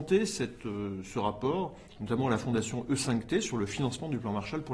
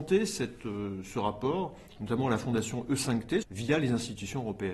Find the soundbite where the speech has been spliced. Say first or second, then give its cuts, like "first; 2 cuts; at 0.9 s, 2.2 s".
second; 1 cut; at 3.4 s